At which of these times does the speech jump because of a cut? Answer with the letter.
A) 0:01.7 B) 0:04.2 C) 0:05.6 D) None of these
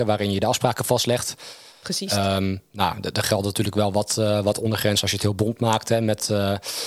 A